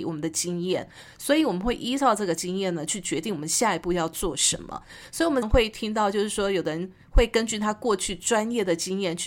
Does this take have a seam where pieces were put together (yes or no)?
yes